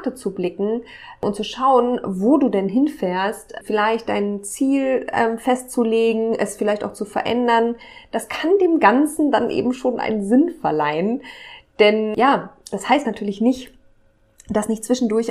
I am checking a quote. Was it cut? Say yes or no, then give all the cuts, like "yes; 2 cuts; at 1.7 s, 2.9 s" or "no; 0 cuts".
no; 0 cuts